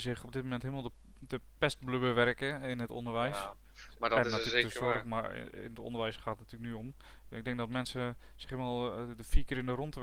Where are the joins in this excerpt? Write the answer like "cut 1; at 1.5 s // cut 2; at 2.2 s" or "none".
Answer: none